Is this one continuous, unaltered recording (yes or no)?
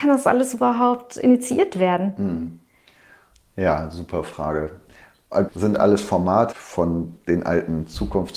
no